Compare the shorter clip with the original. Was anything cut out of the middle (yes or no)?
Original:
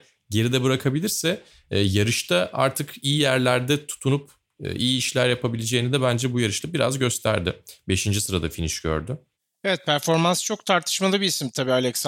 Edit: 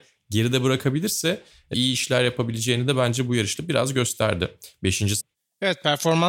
yes